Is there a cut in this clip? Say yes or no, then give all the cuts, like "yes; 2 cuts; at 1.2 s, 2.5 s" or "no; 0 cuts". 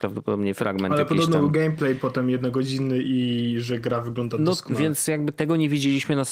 no; 0 cuts